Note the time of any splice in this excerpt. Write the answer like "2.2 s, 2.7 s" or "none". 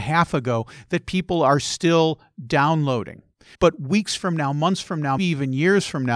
3.5 s, 5.2 s